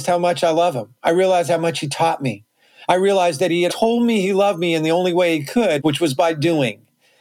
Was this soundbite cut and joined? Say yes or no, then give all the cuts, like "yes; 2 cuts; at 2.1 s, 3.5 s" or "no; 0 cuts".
yes; 2 cuts; at 3.7 s, 5.8 s